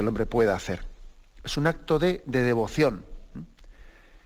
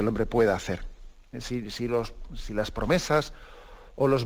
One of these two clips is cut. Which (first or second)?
second